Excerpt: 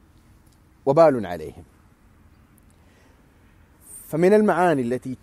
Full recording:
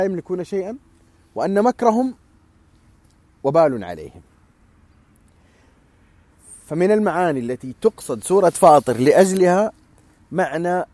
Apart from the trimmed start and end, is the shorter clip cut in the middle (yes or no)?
no